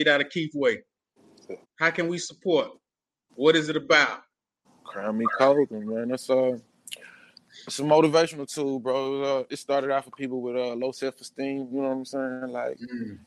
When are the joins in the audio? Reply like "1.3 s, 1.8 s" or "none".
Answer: 1.6 s